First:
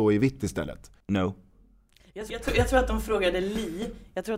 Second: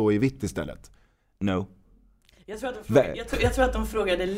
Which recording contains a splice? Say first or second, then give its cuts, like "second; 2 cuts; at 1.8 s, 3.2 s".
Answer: first; 2 cuts; at 1.0 s, 2.3 s